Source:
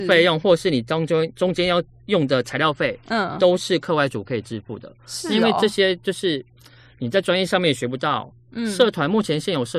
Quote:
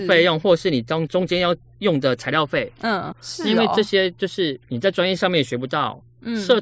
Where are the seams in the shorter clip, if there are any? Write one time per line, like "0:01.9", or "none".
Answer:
0:01.1
0:03.1
0:04.6